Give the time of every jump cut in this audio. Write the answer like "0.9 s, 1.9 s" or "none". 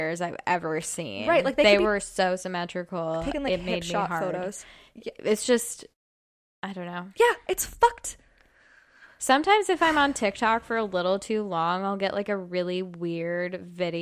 none

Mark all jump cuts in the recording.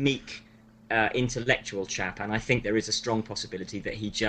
none

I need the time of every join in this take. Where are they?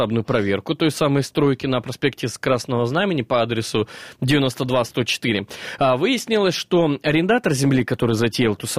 none

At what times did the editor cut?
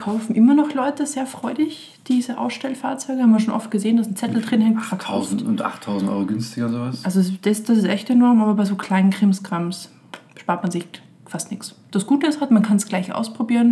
none

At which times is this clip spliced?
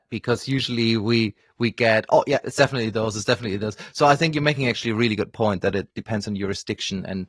2.4 s

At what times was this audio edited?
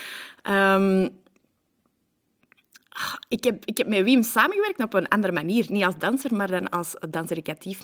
none

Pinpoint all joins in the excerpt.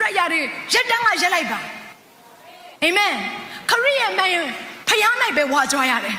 2.8 s

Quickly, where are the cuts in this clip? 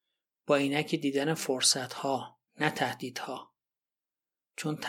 2.5 s

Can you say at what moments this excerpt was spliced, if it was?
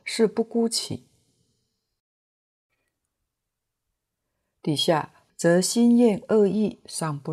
5.3 s

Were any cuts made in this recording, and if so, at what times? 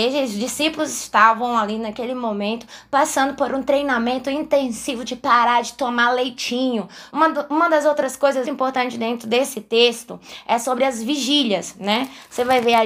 7.1 s, 8.4 s

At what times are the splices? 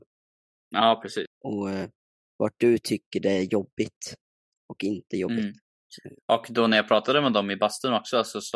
1.3 s

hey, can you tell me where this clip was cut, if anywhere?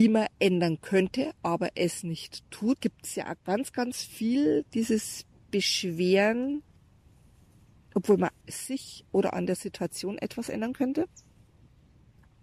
2.8 s, 8.4 s

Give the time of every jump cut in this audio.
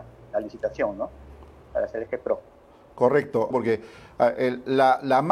3.5 s

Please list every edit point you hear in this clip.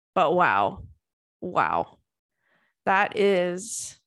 none

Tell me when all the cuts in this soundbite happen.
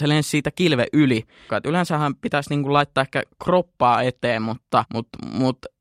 1.5 s

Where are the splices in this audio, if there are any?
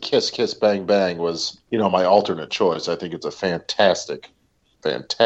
1.6 s

